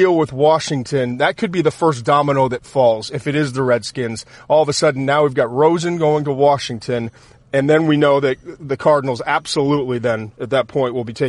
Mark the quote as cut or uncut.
uncut